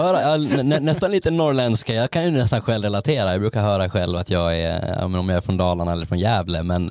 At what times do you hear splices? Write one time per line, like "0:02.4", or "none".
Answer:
none